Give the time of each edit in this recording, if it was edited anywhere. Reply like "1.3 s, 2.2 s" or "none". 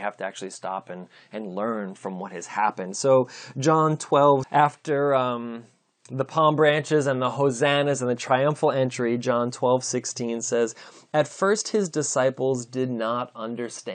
4.4 s